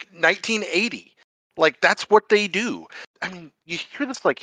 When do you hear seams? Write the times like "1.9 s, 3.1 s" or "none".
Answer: 3.1 s